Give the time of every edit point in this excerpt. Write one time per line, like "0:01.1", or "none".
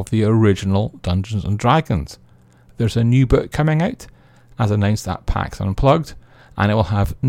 none

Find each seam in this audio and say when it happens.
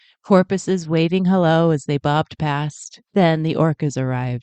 0:03.0

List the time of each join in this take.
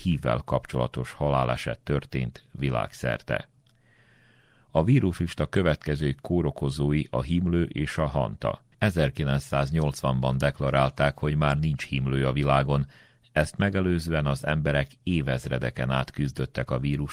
0:08.7

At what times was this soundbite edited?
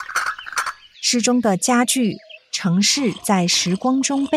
0:02.4

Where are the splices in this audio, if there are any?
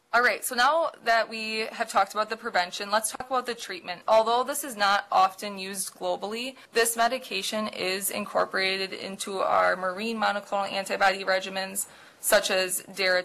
0:04.0
0:06.7

